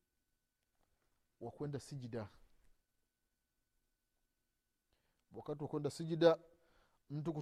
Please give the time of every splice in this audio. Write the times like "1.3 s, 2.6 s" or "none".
none